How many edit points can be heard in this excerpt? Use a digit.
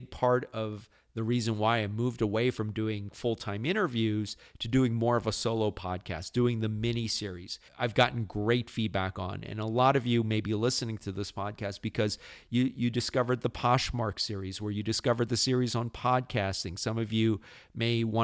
1